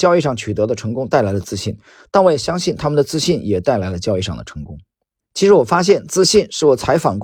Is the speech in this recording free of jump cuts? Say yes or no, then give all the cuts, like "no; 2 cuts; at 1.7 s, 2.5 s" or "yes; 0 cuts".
no; 1 cut; at 5.2 s